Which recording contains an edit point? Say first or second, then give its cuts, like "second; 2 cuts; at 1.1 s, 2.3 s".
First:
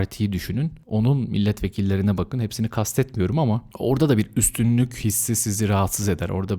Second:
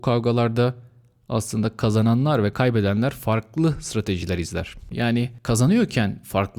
second; 1 cut; at 4.9 s